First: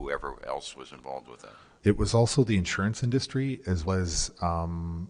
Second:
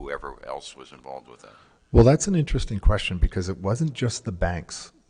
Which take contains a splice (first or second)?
first